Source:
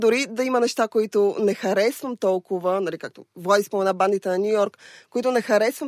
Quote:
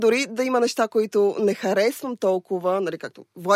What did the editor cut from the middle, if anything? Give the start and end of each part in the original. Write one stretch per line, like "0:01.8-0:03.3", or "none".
none